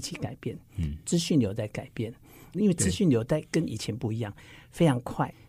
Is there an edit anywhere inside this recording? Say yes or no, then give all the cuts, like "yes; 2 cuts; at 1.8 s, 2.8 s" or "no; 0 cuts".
yes; 1 cut; at 2.5 s